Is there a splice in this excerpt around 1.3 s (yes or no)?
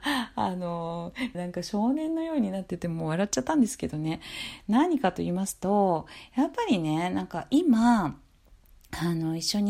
yes